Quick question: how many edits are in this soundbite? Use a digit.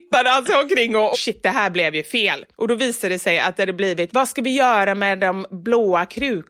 2